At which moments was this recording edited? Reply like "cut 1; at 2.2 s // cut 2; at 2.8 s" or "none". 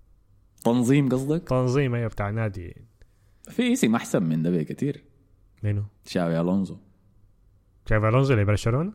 cut 1; at 6.0 s